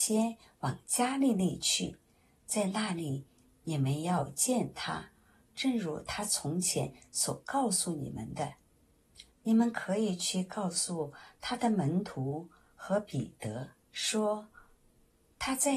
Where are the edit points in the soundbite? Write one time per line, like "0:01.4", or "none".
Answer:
0:09.3
0:13.8